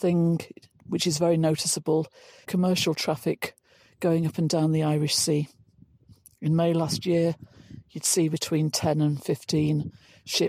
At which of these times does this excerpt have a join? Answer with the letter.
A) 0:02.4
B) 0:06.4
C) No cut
A